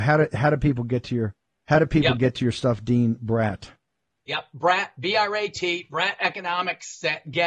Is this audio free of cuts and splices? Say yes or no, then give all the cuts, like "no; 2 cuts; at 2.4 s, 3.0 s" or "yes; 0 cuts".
yes; 0 cuts